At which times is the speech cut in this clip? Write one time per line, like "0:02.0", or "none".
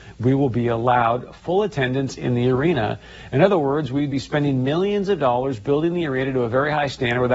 none